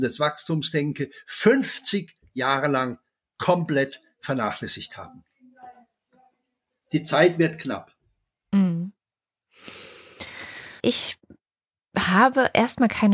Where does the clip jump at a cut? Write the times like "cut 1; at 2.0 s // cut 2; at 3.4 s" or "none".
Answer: cut 1; at 10.8 s